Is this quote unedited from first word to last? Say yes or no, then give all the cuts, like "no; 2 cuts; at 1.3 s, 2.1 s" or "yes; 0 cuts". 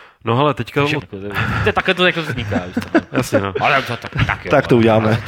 no; 1 cut; at 1.0 s